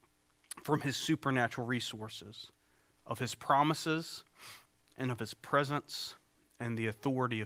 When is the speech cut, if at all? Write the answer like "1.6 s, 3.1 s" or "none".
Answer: none